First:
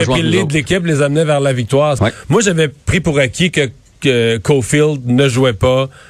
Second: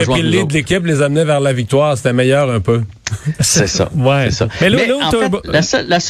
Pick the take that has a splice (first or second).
first